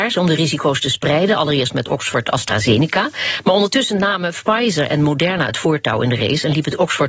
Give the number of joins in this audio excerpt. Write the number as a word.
zero